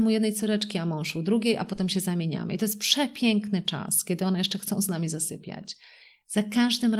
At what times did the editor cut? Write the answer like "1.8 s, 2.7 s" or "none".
none